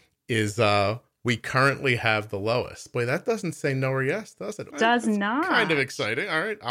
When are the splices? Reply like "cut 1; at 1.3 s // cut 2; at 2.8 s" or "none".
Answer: cut 1; at 4.7 s